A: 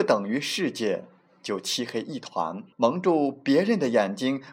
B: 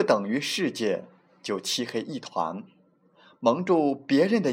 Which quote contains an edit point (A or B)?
A